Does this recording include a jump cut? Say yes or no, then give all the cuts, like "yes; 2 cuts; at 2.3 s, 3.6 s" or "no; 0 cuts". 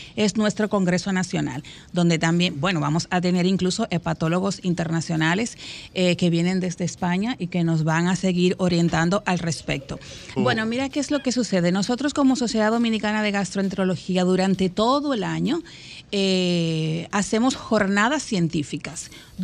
yes; 1 cut; at 10.4 s